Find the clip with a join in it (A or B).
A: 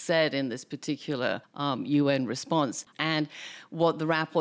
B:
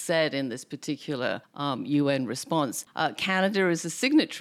A